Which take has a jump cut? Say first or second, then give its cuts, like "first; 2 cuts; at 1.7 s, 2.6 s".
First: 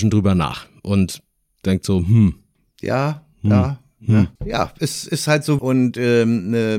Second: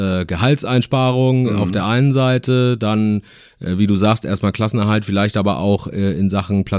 first; 2 cuts; at 4.4 s, 5.6 s